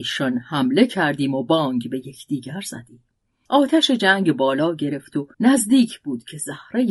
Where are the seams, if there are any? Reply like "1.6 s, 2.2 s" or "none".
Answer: 5.3 s